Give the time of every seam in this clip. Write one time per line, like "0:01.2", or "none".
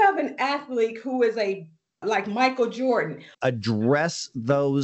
0:02.0
0:03.3